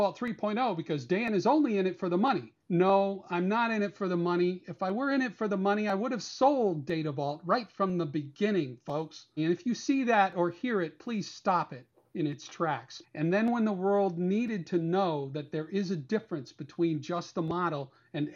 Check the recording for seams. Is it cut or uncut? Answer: cut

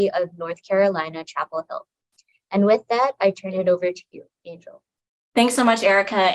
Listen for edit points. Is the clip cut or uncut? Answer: cut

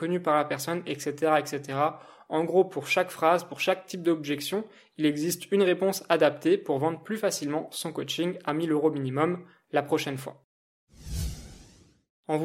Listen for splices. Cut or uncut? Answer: uncut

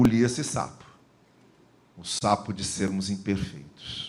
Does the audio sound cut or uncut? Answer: uncut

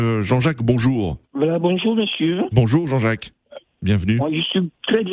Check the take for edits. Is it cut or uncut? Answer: cut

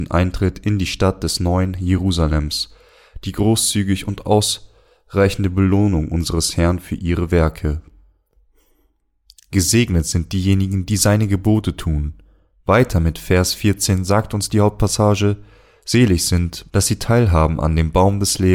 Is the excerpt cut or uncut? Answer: cut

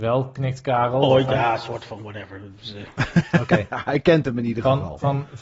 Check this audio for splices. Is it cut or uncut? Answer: uncut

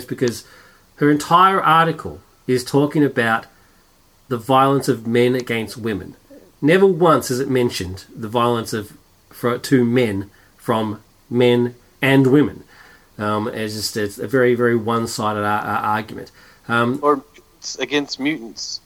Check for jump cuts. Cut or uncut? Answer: uncut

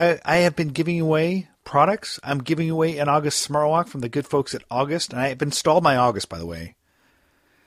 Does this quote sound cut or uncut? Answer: uncut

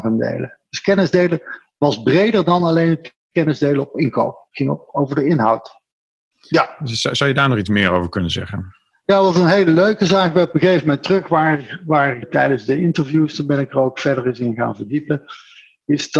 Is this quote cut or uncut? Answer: cut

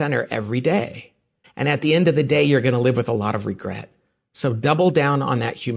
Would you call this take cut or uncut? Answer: cut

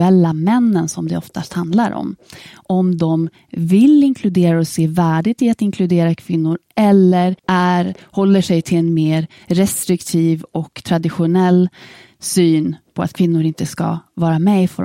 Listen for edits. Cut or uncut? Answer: cut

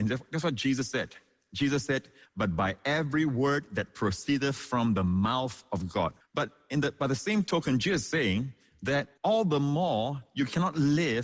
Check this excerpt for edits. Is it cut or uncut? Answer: cut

